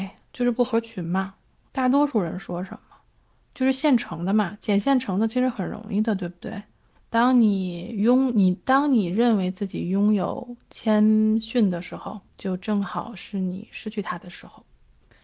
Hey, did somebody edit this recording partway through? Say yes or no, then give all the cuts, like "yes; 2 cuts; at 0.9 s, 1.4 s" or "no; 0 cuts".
yes; 3 cuts; at 1.7 s, 7.0 s, 12.3 s